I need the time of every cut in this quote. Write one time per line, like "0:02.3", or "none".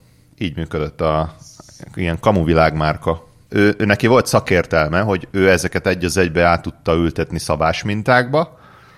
0:03.5